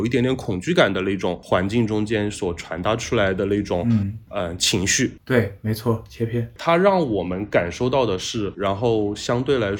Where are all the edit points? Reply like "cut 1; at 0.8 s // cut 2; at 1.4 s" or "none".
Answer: cut 1; at 5.2 s // cut 2; at 8.5 s